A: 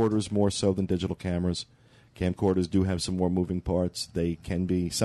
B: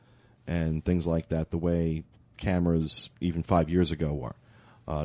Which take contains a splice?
B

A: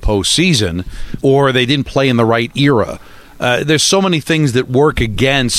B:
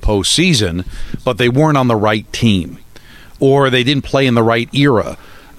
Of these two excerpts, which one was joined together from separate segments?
A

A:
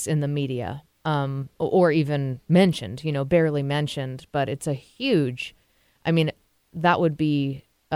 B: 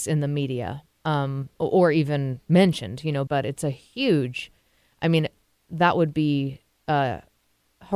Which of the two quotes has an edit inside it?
B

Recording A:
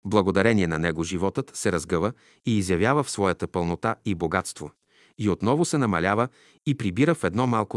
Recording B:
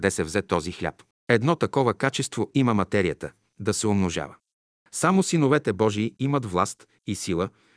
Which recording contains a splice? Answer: B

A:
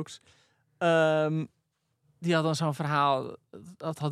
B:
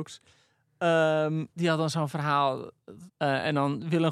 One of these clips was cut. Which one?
B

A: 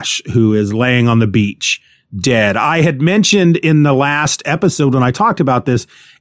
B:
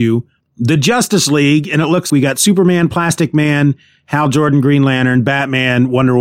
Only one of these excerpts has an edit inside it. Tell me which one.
B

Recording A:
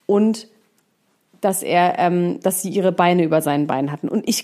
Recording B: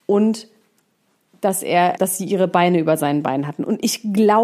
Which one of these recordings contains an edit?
B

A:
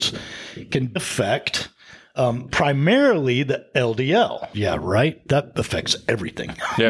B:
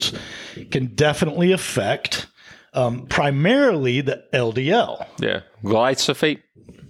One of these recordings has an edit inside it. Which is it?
A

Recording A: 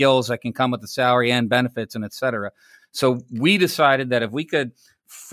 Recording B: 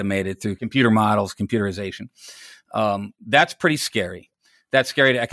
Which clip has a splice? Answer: A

